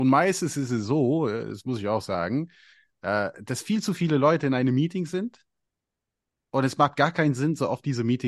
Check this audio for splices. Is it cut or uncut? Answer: uncut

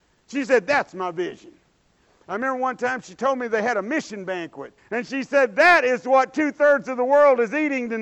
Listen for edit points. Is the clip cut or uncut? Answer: cut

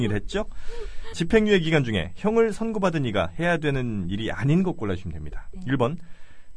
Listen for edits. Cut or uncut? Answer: cut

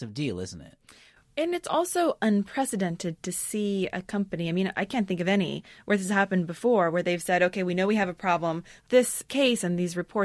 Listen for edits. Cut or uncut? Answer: cut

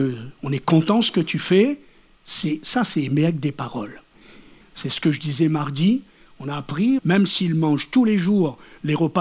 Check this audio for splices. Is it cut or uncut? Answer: cut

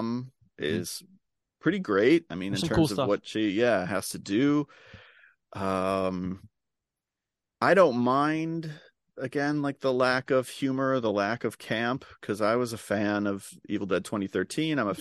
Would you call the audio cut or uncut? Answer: uncut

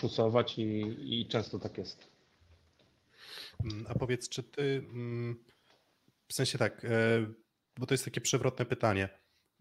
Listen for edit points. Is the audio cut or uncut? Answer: uncut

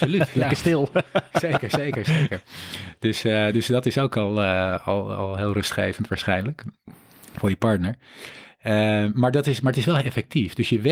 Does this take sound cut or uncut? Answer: uncut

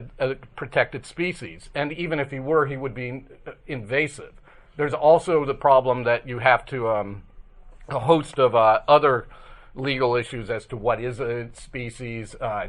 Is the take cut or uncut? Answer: uncut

